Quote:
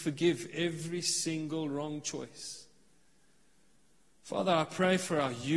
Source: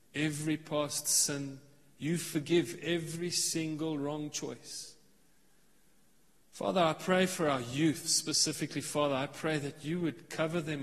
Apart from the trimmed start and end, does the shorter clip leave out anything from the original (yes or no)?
no